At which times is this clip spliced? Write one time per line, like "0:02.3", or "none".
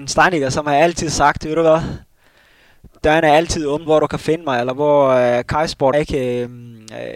0:03.9
0:05.9

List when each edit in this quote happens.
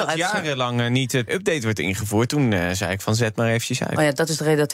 0:01.3

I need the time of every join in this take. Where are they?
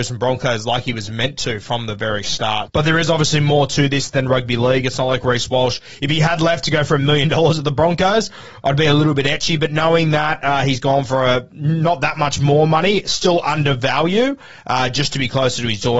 0:02.7

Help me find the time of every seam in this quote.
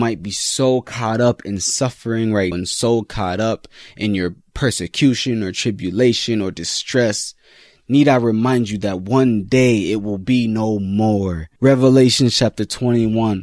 0:02.5
0:11.6

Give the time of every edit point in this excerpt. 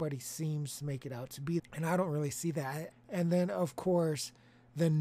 0:01.6
0:02.9

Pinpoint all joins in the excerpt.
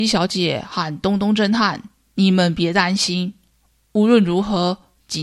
none

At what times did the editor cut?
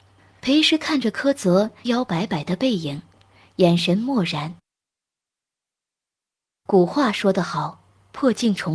0:01.9

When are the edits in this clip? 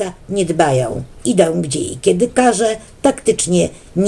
0:01.2

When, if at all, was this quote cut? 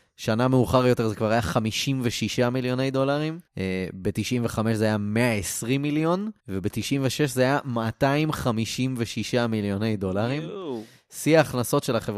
0:03.5
0:06.4

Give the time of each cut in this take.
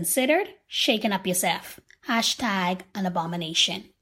none

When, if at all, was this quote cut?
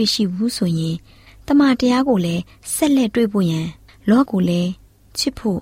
0:04.3

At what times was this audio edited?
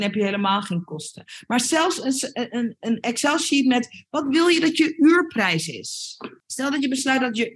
0:06.4

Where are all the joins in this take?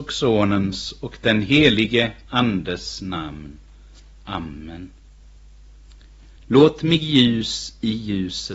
0:06.4

